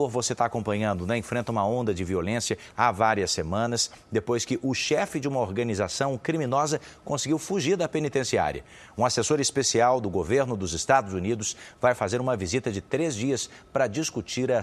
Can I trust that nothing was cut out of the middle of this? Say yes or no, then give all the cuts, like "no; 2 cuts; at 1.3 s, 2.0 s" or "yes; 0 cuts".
yes; 0 cuts